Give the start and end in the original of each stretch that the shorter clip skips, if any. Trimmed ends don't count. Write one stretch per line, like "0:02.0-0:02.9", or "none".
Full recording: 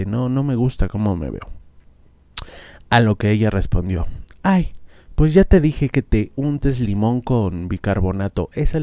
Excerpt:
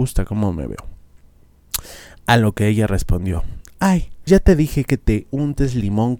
0:04.9-0:05.3